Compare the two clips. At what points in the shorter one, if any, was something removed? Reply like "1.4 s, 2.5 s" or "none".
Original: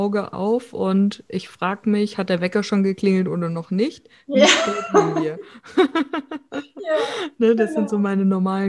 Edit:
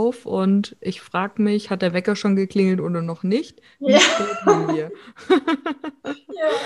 none